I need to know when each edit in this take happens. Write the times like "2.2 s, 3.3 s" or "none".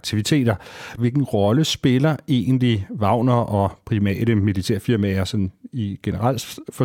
1.0 s